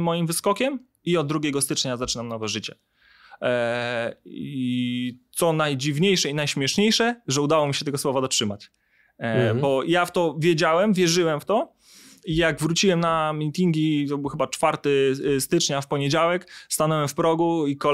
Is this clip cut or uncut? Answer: uncut